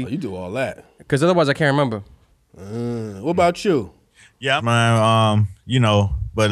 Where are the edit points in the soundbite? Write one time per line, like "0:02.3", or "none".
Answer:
0:04.6